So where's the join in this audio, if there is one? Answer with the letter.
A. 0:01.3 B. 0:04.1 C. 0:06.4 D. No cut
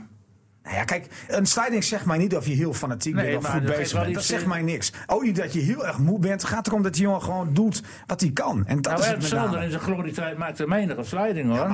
A